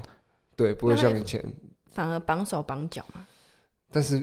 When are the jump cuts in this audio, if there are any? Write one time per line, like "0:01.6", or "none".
none